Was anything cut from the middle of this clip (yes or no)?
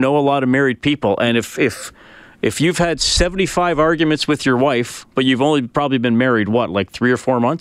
yes